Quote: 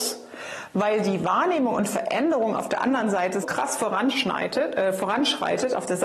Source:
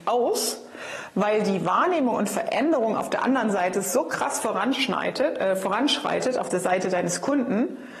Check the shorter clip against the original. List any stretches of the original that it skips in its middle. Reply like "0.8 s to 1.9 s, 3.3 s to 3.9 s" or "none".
3.8 s to 4.0 s